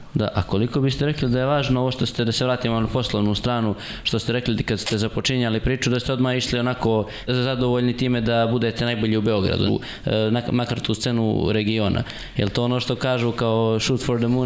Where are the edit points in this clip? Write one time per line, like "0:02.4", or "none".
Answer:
0:07.3
0:09.7